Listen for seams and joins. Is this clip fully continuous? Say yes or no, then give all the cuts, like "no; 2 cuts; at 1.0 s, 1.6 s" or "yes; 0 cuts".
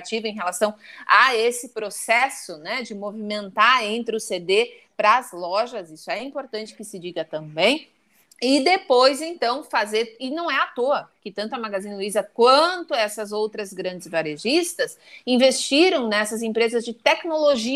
yes; 0 cuts